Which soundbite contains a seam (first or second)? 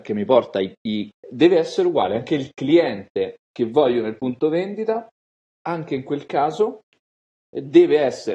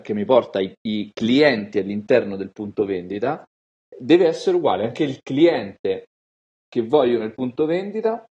first